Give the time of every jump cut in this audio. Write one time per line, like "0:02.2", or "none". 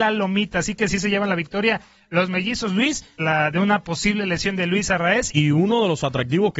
0:03.2
0:05.3